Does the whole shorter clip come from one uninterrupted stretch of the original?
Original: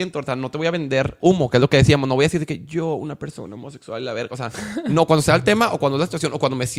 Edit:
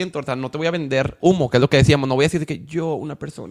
yes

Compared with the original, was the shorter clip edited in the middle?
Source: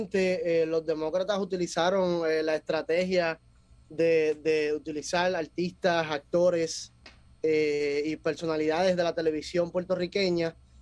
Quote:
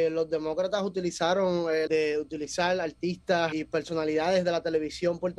yes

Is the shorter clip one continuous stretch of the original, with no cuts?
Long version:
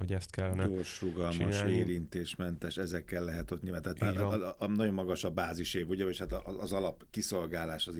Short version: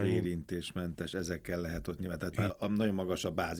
no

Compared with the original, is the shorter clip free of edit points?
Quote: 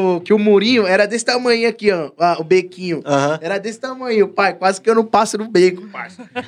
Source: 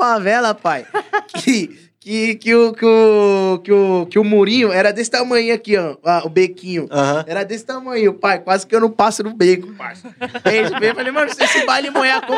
yes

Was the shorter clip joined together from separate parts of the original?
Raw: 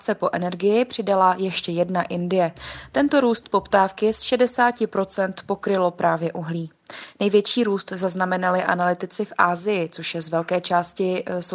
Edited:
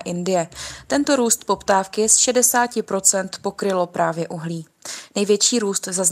no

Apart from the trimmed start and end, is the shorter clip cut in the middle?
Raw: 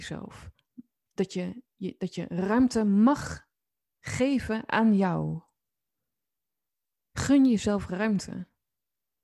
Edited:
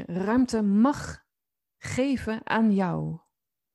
no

